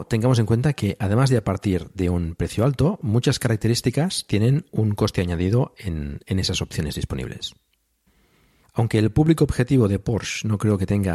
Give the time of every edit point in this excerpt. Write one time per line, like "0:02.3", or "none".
0:08.6